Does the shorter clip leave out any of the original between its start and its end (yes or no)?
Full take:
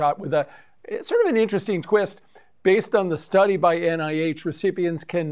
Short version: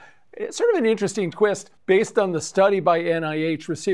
yes